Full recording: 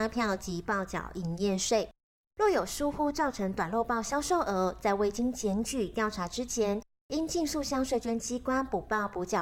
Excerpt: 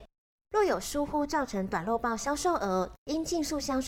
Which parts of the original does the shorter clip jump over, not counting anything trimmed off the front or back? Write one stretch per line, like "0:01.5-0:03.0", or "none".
0:04.8-0:07.0